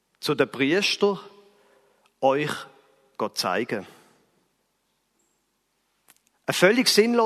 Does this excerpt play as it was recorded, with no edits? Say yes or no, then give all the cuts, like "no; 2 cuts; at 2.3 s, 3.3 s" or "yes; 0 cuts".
yes; 0 cuts